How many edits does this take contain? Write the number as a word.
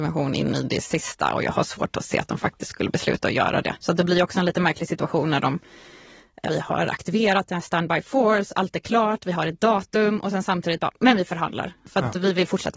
two